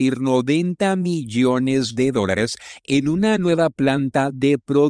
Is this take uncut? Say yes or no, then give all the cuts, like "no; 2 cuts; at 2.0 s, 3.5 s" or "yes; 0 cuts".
yes; 0 cuts